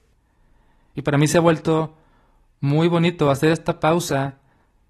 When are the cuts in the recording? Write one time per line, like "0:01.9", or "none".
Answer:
none